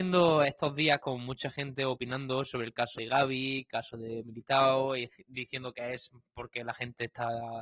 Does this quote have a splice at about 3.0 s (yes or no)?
yes